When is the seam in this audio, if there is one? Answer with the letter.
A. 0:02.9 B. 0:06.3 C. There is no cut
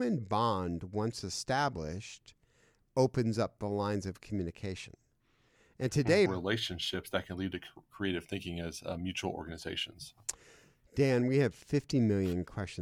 B